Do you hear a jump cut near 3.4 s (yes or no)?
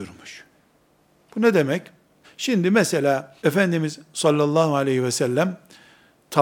yes